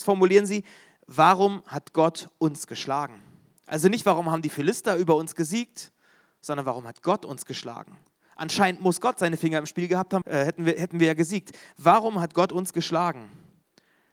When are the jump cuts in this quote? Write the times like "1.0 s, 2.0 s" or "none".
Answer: 10.2 s

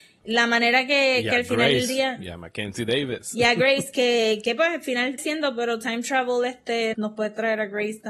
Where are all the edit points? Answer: 5.2 s, 6.9 s

